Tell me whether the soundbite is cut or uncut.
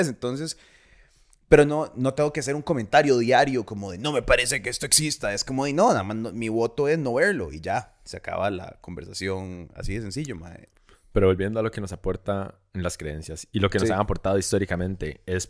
uncut